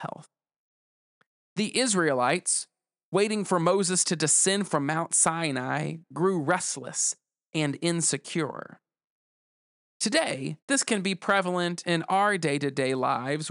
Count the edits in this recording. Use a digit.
1